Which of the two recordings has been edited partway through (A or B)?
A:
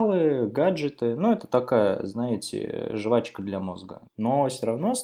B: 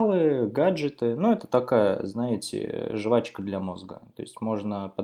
A